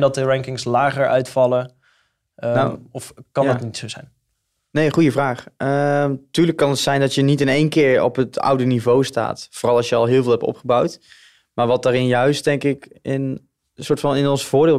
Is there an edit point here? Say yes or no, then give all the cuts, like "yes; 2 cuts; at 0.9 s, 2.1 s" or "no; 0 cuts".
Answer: no; 0 cuts